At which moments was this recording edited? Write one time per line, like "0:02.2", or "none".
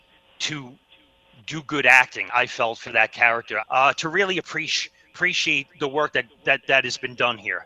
0:02.3
0:03.6